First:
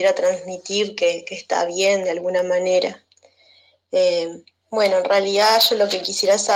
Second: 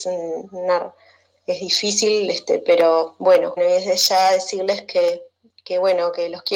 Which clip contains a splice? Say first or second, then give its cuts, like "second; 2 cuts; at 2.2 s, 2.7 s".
second; 1 cut; at 3.6 s